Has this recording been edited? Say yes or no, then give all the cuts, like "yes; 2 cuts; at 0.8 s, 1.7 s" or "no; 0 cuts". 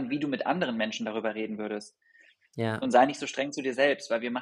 no; 0 cuts